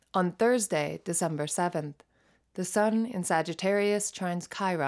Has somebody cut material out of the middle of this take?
no; 0 cuts

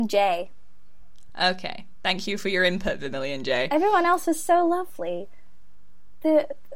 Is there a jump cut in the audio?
no; 0 cuts

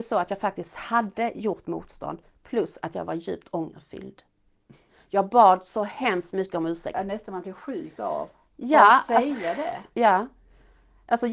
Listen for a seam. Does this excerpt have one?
yes; 1 cut; at 6.9 s

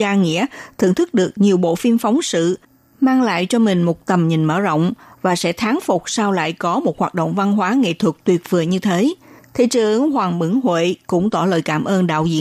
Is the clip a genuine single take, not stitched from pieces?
no; 1 cut; at 9.4 s

